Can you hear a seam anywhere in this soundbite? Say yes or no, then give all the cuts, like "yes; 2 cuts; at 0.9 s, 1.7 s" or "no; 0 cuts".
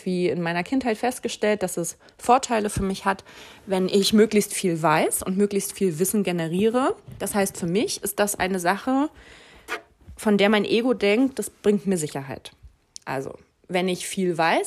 no; 0 cuts